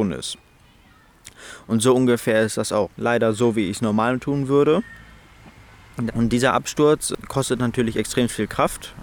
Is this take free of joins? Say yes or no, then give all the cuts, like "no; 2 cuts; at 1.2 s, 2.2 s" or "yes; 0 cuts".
no; 2 cuts; at 2.9 s, 6.1 s